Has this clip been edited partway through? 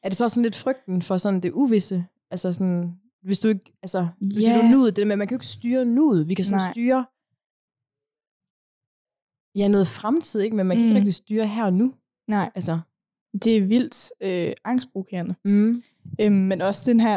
no; 0 cuts

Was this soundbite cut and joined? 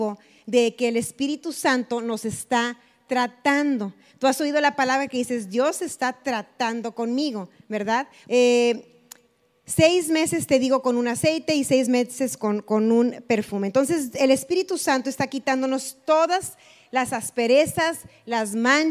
yes; 1 cut; at 8.3 s

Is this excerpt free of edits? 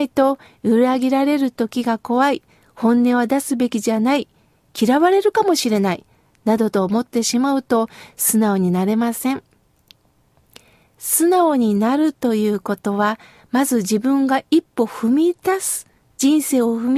yes; 0 cuts

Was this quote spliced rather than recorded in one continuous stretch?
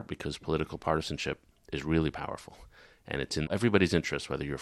no; 0 cuts

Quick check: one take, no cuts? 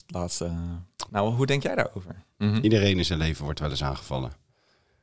no; 2 cuts; at 1.1 s, 2.3 s

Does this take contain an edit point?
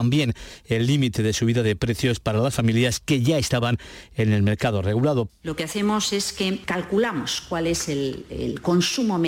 yes; 1 cut; at 5.3 s

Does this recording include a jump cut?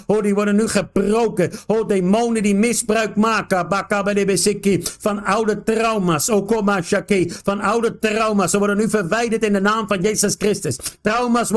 no; 0 cuts

